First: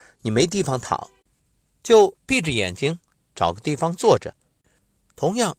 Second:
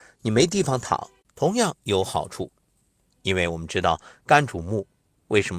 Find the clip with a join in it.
second; 1 cut; at 1.2 s

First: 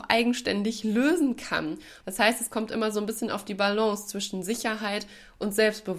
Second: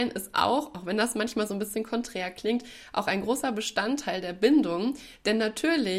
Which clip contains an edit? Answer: first; 1 cut; at 2.0 s

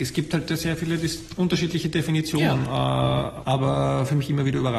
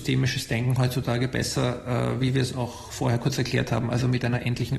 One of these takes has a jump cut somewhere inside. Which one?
first; 1 cut; at 3.4 s

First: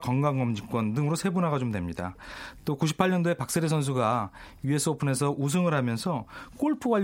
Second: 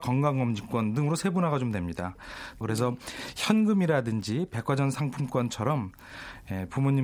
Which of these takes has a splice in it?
second; 1 cut; at 2.6 s

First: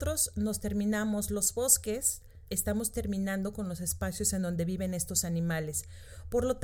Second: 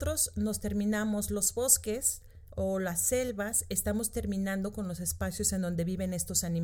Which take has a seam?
first; 1 cut; at 2.5 s

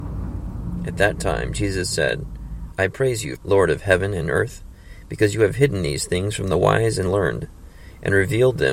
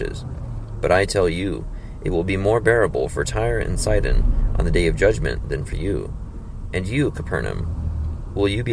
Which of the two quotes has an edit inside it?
first; 1 cut; at 3.4 s

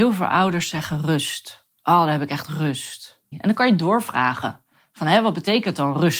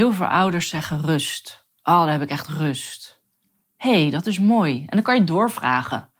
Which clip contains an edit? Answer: first; 1 cut; at 3.3 s

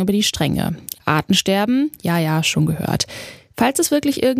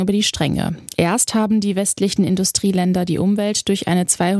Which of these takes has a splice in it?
first; 1 cut; at 1.0 s

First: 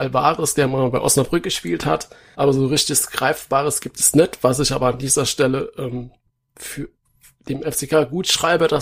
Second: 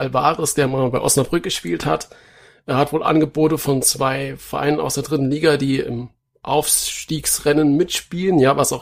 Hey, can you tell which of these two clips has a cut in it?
first; 1 cut; at 2.3 s

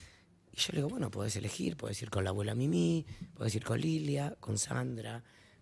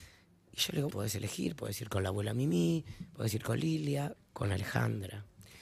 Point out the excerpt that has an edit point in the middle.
second; 2 cuts; at 0.9 s, 4.2 s

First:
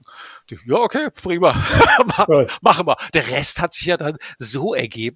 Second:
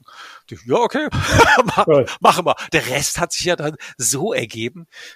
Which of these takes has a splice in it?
second; 1 cut; at 1.1 s

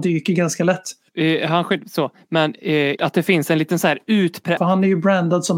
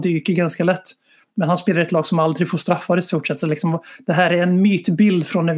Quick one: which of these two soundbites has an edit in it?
first; 3 cuts; at 1.1 s, 3.0 s, 4.6 s

